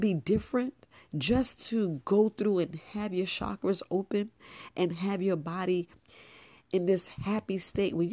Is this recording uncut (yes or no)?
yes